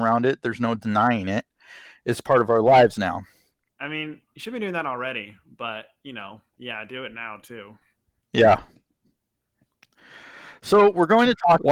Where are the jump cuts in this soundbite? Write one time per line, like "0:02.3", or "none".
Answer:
0:03.7